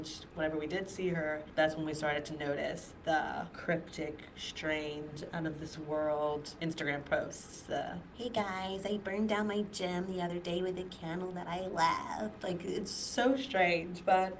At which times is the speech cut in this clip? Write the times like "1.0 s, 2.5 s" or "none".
none